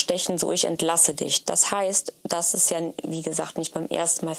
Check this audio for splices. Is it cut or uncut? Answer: uncut